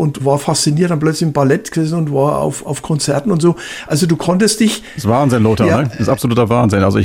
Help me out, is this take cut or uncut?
uncut